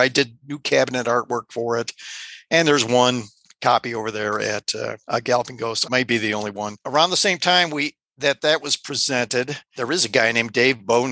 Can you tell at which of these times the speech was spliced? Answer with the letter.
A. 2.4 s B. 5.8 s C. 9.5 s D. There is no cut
B